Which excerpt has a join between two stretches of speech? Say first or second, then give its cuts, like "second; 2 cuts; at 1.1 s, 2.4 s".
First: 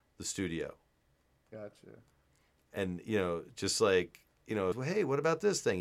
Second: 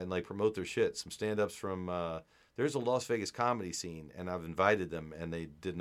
first; 1 cut; at 4.7 s